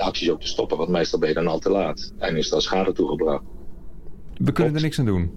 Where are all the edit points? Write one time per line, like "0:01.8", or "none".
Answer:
0:04.3